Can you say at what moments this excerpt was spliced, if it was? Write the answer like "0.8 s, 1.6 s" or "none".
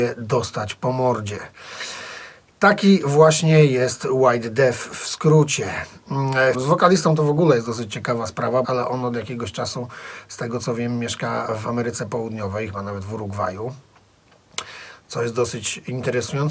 6.5 s, 8.6 s